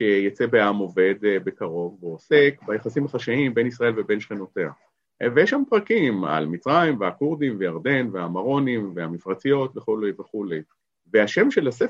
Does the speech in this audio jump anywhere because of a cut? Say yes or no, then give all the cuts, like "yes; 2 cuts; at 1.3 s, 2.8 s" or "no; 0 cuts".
no; 0 cuts